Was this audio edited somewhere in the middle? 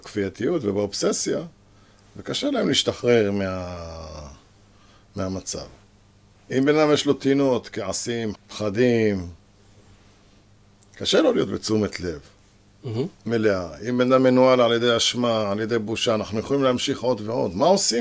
yes; 1 cut; at 8.3 s

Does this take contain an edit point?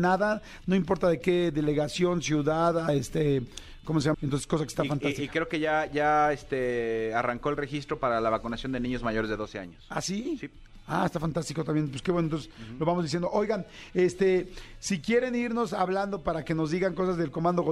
yes; 1 cut; at 4.1 s

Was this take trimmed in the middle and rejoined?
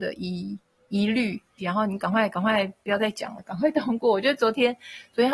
yes; 2 cuts; at 1.6 s, 3.4 s

